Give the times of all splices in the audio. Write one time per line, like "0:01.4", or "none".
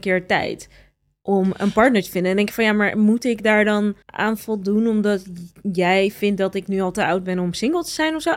0:04.0